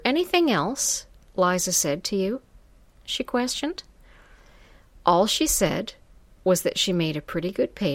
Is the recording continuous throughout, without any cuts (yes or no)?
no